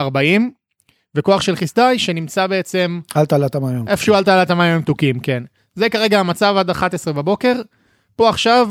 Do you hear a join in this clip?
no; 0 cuts

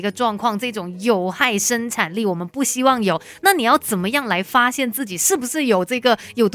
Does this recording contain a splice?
no; 0 cuts

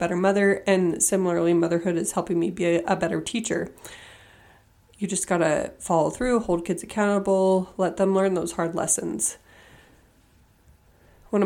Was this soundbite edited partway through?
no; 0 cuts

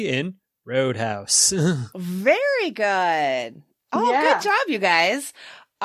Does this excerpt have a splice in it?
no; 0 cuts

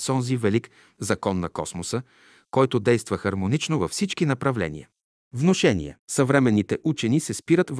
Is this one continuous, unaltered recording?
no; 1 cut; at 6.0 s

